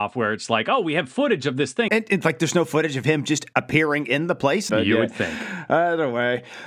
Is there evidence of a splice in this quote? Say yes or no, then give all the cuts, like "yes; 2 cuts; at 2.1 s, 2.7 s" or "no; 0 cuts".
yes; 2 cuts; at 1.9 s, 4.7 s